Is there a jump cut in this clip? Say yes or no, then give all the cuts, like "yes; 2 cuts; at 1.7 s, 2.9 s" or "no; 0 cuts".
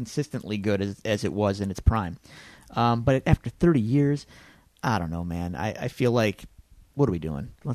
no; 0 cuts